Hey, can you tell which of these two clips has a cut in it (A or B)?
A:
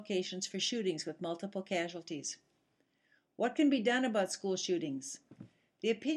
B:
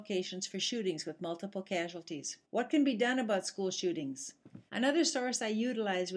B